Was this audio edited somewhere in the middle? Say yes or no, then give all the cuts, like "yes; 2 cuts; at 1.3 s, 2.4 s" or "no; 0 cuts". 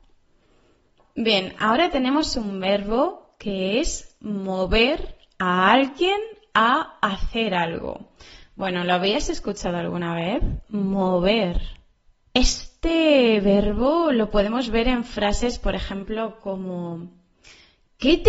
no; 0 cuts